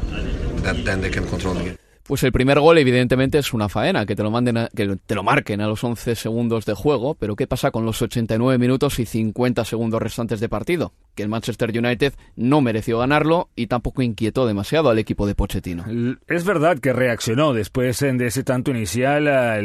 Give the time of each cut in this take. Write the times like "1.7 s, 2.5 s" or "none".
none